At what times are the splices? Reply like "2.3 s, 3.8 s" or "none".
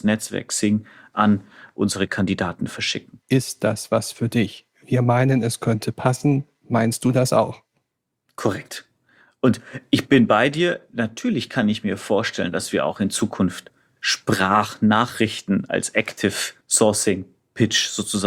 3.2 s, 16.6 s